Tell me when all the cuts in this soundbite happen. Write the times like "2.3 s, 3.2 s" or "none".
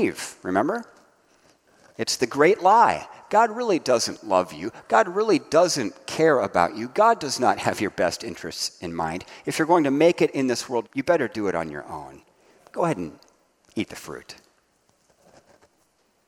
10.8 s